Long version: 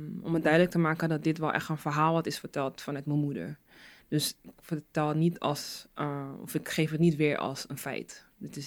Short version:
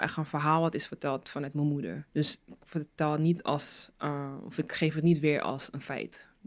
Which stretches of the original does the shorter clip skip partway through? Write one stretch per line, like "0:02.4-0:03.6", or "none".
0:03.6-0:04.0